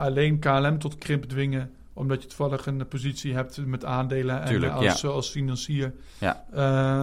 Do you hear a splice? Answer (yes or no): no